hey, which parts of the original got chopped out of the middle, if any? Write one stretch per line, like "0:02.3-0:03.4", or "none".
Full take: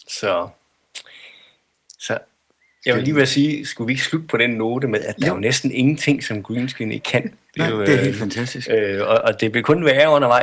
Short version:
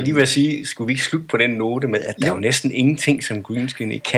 none